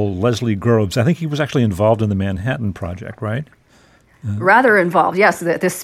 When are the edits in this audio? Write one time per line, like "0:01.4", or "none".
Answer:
none